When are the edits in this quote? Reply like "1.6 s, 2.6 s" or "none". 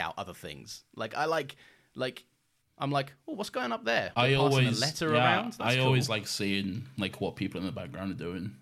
2.6 s, 4.1 s